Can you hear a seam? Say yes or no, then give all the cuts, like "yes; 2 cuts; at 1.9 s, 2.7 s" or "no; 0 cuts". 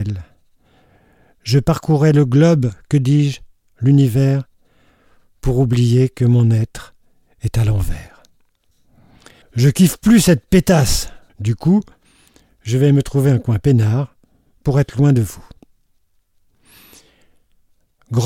yes; 2 cuts; at 9.4 s, 11.3 s